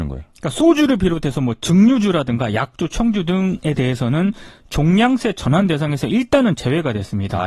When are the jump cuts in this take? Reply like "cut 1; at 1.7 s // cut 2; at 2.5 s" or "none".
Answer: none

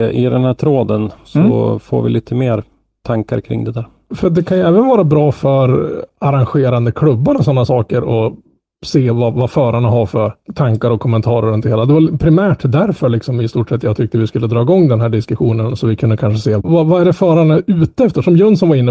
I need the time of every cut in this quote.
cut 1; at 16.6 s

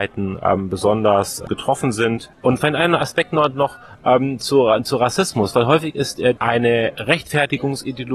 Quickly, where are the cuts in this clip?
cut 1; at 6.4 s

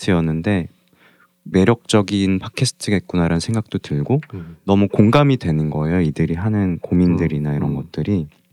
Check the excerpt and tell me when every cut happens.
cut 1; at 1.5 s

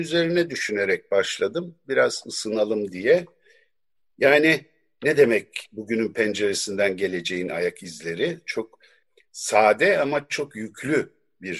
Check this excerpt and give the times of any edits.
none

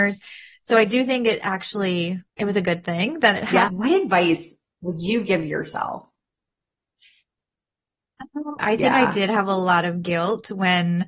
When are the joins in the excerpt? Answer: cut 1; at 2.3 s // cut 2; at 3.7 s // cut 3; at 8.6 s

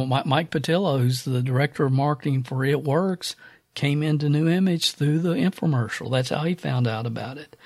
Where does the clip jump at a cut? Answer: none

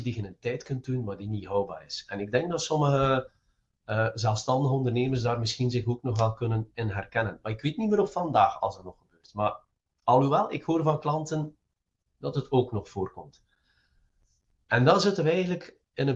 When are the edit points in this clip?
none

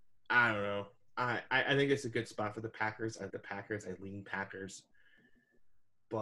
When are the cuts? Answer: cut 1; at 3.3 s

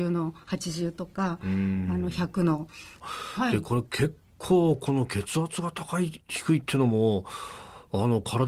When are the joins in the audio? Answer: cut 1; at 3.0 s

